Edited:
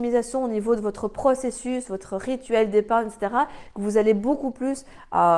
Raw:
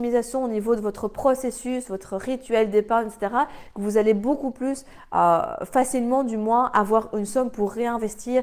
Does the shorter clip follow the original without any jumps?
yes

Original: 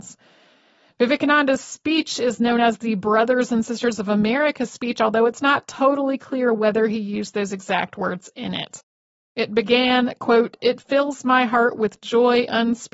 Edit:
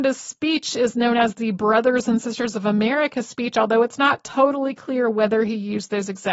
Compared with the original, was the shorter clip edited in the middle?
no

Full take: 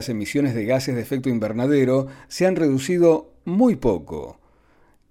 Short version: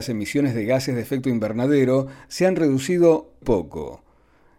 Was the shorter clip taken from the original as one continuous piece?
no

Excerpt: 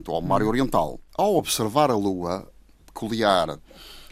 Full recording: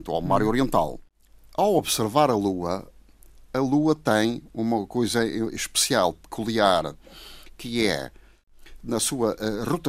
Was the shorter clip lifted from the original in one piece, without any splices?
no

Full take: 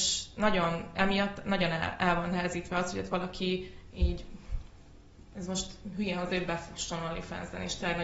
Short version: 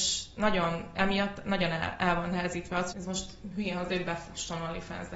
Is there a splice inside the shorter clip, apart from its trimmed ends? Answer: yes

